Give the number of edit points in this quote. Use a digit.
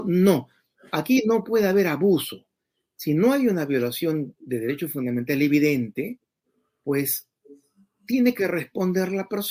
0